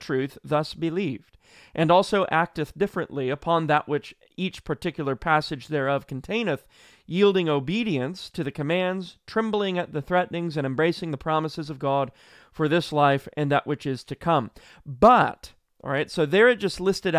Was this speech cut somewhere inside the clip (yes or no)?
no